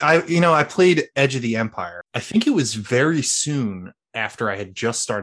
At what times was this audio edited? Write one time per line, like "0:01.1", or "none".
0:02.1